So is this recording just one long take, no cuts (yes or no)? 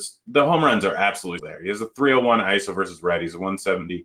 no